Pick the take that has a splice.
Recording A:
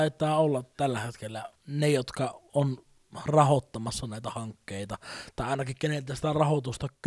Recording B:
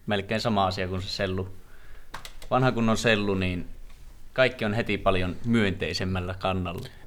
A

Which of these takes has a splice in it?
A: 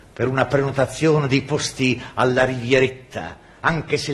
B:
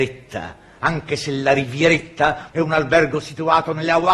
B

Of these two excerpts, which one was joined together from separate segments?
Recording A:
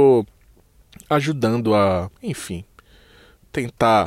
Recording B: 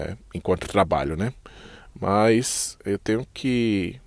A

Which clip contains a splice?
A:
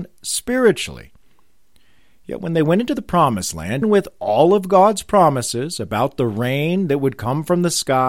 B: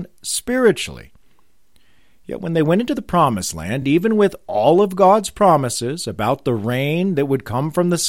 A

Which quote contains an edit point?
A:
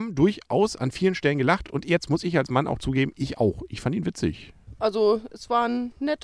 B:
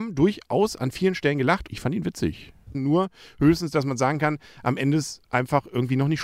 B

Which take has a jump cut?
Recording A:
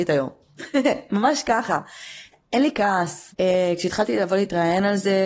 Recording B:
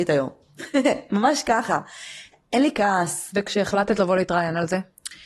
A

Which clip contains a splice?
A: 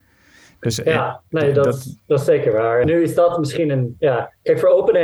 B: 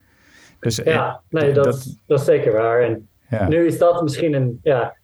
A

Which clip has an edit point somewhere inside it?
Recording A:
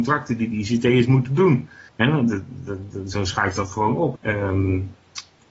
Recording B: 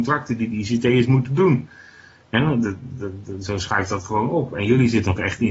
A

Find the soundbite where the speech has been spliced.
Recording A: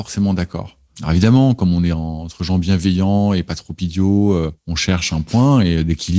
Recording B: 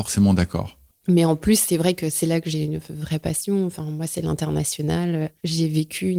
B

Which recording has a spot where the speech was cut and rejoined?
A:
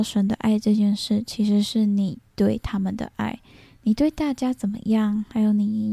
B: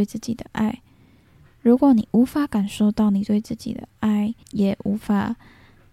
B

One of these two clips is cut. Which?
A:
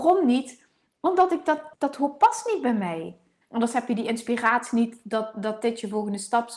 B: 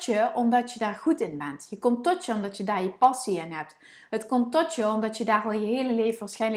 A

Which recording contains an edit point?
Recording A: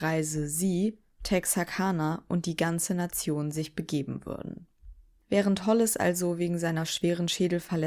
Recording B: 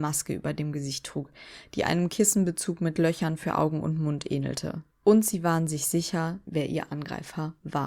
B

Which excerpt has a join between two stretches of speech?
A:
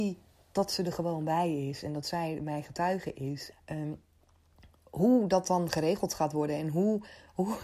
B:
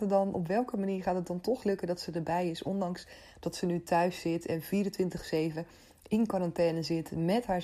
A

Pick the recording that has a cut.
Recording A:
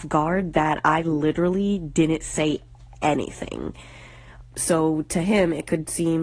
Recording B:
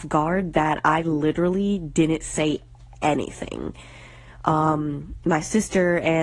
A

